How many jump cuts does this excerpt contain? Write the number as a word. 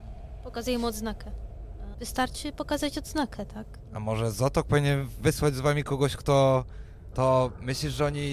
two